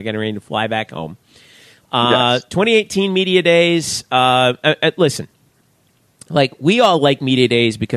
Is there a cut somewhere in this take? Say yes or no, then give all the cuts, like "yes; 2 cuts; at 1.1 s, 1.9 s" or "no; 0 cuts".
no; 0 cuts